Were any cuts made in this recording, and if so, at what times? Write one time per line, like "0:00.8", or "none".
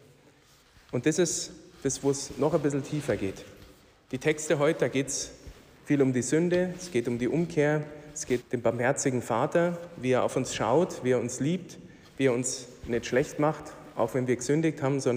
0:08.4